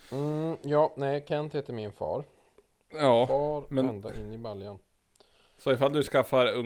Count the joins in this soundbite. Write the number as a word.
zero